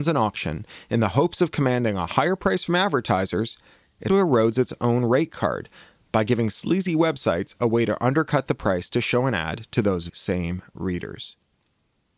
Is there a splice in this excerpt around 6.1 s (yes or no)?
no